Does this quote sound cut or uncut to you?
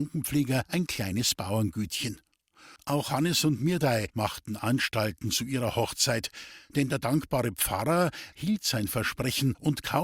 cut